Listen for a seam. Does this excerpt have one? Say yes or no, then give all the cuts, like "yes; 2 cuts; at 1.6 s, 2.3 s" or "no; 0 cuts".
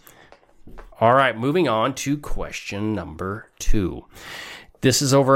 yes; 1 cut; at 0.9 s